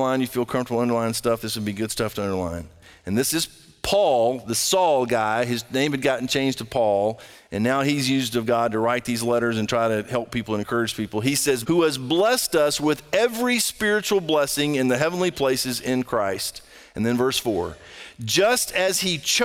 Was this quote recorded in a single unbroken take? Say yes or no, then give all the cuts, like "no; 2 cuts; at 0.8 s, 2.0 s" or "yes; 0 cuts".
no; 1 cut; at 11.6 s